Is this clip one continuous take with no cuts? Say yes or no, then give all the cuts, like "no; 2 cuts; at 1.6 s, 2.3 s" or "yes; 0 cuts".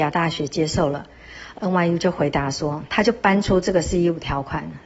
no; 1 cut; at 1.5 s